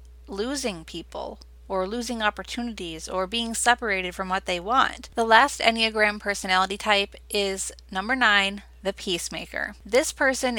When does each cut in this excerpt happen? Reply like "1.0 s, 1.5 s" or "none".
5.1 s